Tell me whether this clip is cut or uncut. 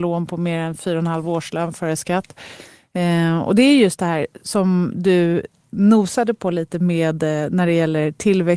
uncut